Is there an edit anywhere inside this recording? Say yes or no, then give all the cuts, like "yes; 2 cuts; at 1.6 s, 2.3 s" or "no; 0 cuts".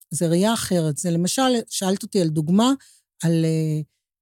no; 0 cuts